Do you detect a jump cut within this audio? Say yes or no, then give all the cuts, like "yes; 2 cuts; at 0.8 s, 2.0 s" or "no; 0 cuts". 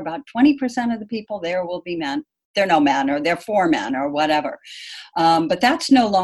no; 0 cuts